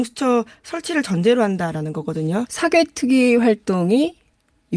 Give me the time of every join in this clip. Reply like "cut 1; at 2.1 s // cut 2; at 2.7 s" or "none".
cut 1; at 2.5 s